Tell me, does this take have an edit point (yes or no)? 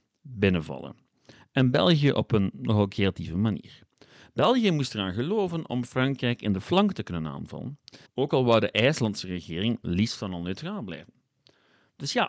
yes